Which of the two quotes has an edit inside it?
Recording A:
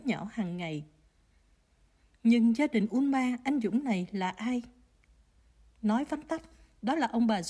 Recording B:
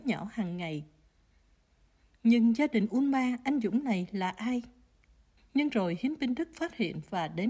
B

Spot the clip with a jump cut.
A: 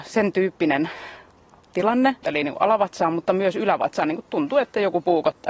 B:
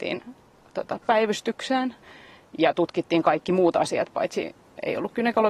A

